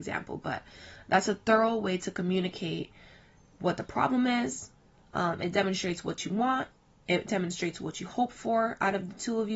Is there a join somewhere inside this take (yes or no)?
no